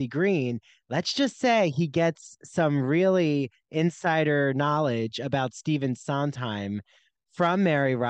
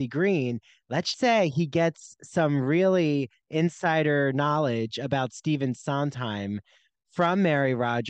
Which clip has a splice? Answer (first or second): second